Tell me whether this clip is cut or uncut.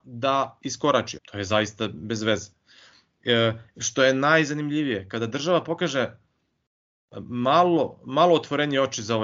cut